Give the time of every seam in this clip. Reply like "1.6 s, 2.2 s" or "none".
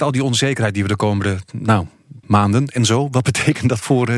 2.2 s